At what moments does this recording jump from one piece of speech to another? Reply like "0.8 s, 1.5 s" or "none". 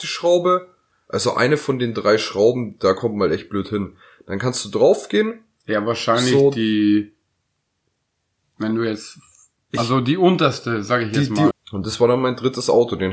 11.5 s

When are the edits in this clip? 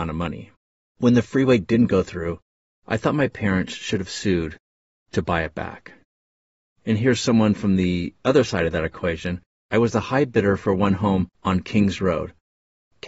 9.5 s

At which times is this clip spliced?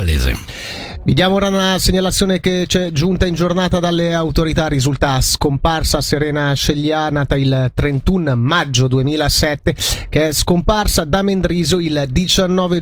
none

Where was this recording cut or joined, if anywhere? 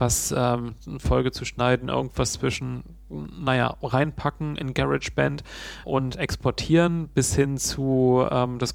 5.8 s

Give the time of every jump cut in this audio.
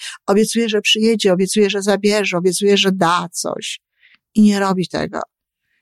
none

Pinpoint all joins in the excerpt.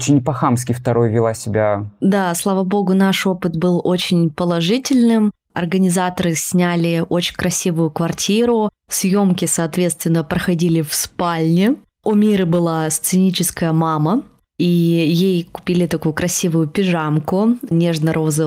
2.0 s

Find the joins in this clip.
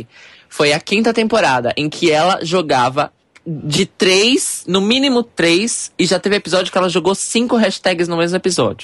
none

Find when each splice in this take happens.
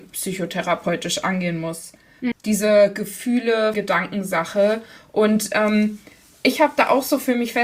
2.3 s, 3.7 s

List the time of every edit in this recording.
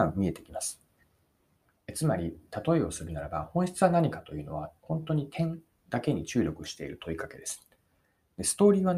1.8 s

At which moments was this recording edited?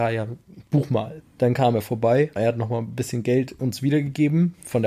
1.2 s, 2.4 s

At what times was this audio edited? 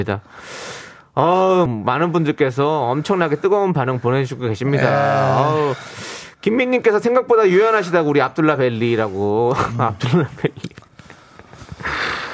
1.7 s

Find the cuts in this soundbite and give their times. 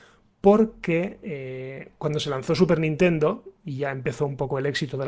none

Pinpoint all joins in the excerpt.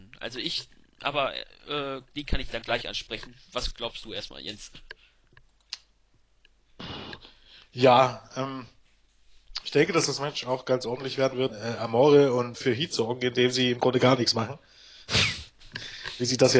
11.5 s, 12.5 s

